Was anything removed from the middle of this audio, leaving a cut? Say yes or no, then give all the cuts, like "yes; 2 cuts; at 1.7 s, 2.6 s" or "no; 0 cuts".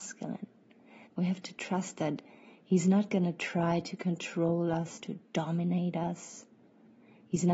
yes; 1 cut; at 1.0 s